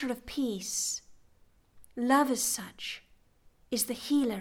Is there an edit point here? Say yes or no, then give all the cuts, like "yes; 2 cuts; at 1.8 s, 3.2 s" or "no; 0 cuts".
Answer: no; 0 cuts